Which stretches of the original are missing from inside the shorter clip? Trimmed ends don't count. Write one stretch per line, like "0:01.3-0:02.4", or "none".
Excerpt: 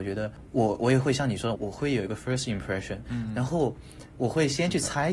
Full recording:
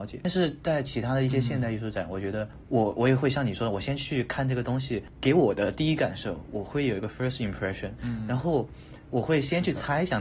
0:03.7-0:06.5